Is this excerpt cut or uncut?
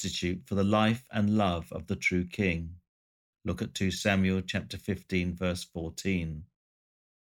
cut